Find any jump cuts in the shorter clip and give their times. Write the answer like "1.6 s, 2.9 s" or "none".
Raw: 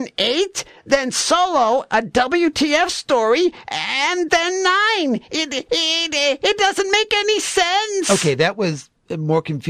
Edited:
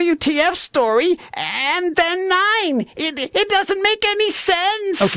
3.3 s